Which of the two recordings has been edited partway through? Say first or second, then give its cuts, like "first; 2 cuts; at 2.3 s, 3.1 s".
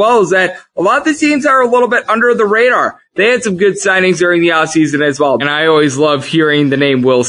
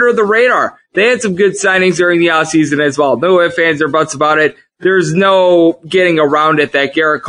first; 1 cut; at 5.4 s